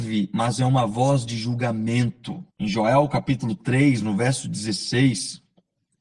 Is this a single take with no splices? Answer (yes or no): no